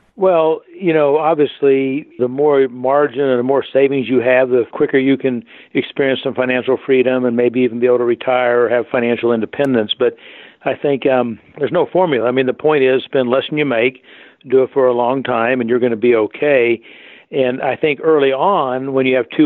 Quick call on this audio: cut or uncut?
uncut